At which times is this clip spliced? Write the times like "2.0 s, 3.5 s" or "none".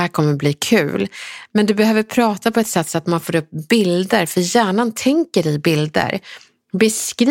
none